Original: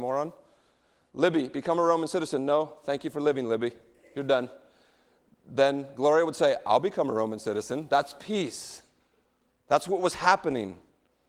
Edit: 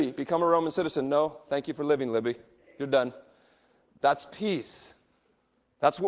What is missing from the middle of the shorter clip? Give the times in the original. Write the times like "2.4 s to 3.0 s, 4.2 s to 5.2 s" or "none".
5.4 s to 7.9 s